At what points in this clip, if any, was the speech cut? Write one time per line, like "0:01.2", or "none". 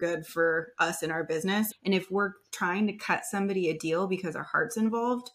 0:01.7